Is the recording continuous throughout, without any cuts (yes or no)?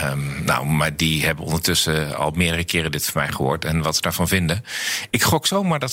yes